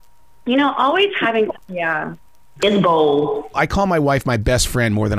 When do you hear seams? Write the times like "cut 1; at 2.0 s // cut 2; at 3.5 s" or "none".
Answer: cut 1; at 1.5 s // cut 2; at 3.5 s